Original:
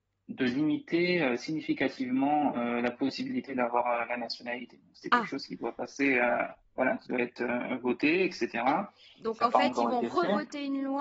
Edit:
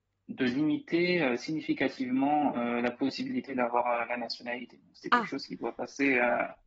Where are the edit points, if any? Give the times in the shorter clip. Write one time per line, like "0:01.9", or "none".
none